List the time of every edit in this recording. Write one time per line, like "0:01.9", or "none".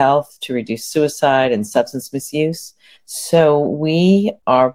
0:02.9